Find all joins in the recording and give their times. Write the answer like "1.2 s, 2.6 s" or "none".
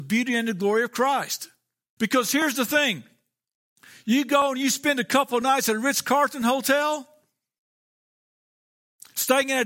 2.0 s